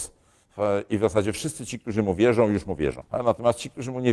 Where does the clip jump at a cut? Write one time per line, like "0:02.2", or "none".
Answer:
0:03.0